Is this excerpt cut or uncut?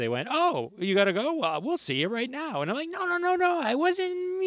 uncut